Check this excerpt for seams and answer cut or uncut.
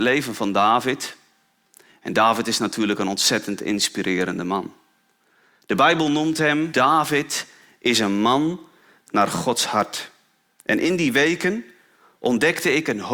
cut